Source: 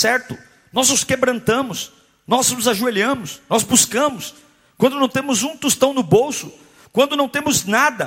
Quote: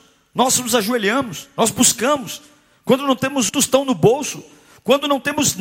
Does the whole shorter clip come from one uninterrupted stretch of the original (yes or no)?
no